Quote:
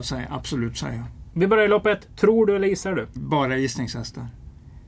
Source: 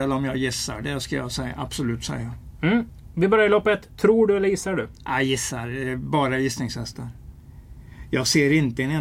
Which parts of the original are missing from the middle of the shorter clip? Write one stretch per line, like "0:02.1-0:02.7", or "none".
0:02.6-0:03.1
0:05.0-0:06.0